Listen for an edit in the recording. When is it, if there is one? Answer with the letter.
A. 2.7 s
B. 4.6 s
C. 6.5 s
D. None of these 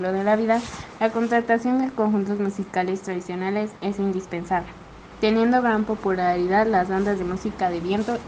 D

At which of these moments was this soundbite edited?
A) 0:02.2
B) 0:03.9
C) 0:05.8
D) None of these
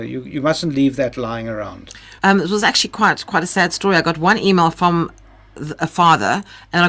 A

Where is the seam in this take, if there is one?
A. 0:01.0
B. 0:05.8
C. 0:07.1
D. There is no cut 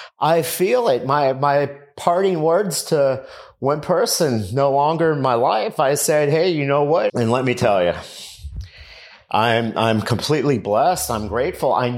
C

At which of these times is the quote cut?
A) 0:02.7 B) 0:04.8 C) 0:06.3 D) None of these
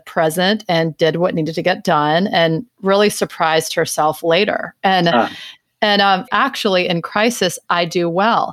C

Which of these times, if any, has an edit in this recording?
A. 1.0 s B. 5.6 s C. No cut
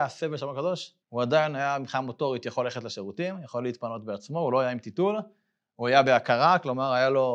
A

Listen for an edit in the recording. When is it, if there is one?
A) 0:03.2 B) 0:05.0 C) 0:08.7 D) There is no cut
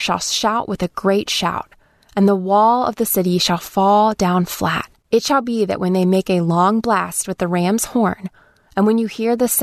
B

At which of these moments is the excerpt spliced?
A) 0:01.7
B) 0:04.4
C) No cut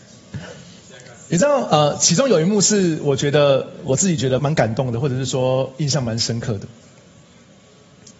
B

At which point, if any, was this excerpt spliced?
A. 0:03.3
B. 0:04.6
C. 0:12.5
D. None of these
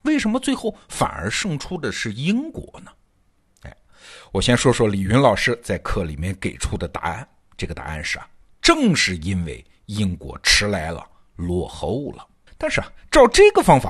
C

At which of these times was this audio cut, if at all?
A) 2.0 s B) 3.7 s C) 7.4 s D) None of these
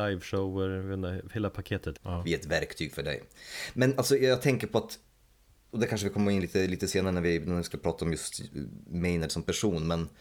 A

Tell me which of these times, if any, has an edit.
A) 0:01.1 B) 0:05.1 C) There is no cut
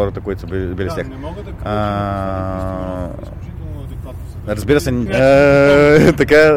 B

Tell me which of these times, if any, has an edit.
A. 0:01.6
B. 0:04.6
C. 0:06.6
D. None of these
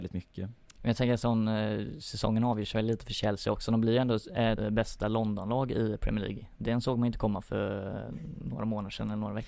B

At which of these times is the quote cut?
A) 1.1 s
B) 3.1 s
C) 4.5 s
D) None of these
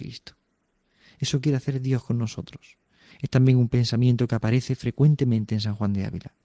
B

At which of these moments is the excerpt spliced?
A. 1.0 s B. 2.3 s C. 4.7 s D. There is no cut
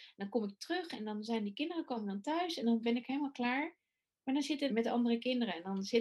C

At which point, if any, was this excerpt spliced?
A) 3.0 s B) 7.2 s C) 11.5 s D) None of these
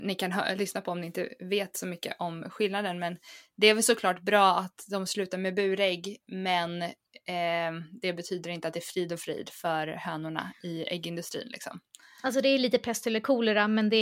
D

